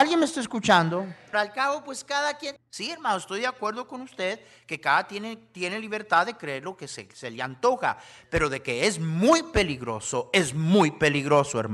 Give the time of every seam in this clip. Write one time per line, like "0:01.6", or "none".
0:01.3
0:02.6